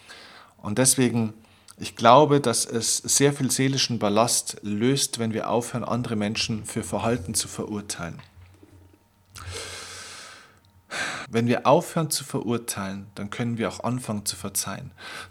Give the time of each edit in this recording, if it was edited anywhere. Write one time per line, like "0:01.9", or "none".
0:11.3